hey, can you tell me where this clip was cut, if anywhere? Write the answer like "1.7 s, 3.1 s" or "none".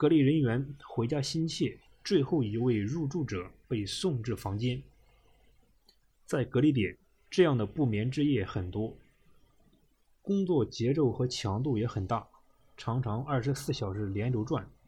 1.9 s